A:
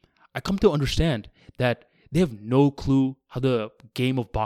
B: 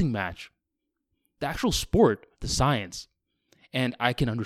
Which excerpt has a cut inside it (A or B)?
B